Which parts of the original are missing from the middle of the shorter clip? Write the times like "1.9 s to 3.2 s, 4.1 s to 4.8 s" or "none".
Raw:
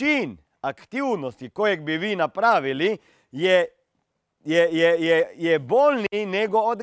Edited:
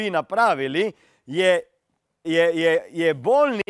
4.3 s to 4.7 s